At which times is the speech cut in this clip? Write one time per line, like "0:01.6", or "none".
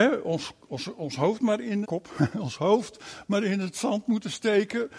0:01.8